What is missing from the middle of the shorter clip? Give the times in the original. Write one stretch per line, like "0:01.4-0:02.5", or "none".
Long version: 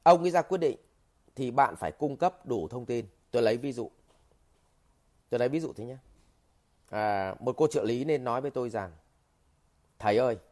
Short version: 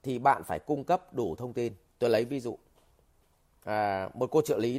0:04.9-0:06.9